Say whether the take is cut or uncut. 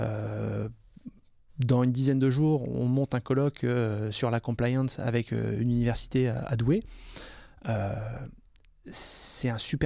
uncut